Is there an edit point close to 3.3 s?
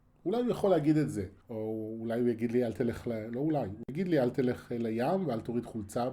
no; 1 cut; at 1.4 s

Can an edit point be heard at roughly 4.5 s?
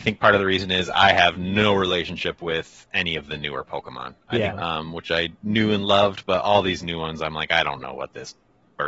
yes; 1 cut; at 4.5 s

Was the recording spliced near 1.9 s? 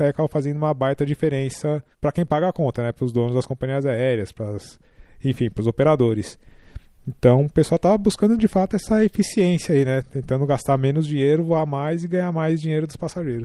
yes; 1 cut; at 1.9 s

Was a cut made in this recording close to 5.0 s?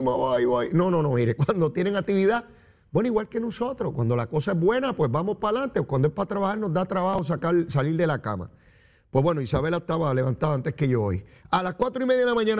no; 0 cuts

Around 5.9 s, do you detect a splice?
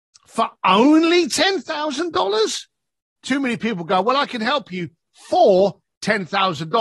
no; 1 cut; at 3.2 s

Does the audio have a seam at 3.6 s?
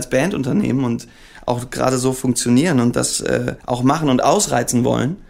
yes; 1 cut; at 3.6 s

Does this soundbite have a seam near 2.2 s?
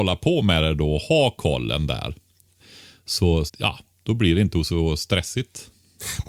no; 1 cut; at 3.5 s

